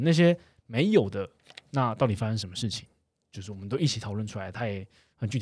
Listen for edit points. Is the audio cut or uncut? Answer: uncut